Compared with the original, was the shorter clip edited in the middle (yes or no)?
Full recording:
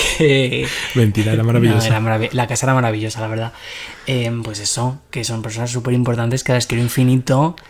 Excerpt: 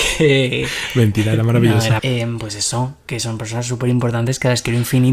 yes